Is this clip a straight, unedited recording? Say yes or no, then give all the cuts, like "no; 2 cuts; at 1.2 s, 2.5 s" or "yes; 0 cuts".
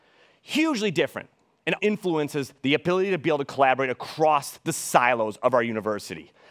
no; 1 cut; at 1.8 s